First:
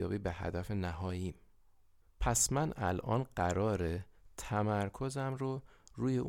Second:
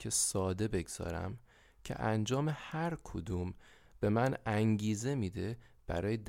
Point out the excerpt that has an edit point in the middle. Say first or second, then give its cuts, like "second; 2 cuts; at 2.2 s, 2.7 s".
first; 1 cut; at 2.1 s